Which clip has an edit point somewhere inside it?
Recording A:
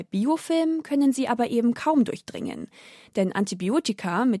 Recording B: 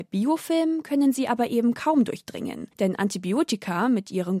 B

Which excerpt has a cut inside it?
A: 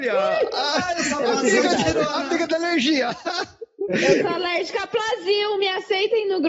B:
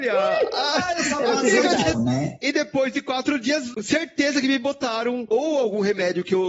B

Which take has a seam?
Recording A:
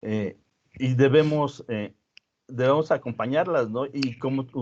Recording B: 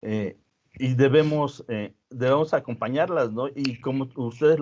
B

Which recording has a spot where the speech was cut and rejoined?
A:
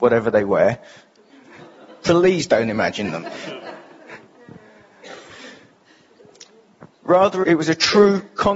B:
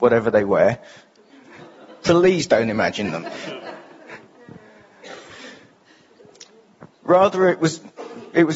A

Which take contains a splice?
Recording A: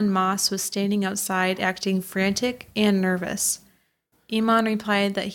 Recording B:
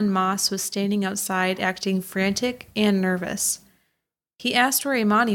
A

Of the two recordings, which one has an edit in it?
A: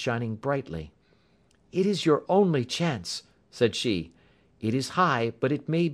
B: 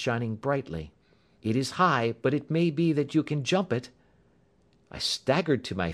B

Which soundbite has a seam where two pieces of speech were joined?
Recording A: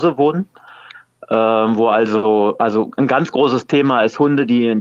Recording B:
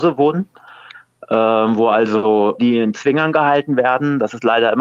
B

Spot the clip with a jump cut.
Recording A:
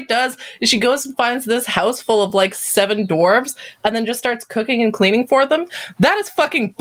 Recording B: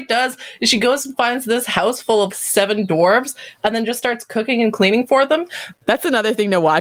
B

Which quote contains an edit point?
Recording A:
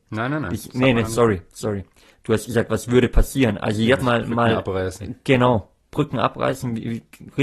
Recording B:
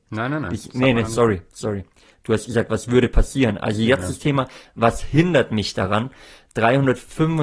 A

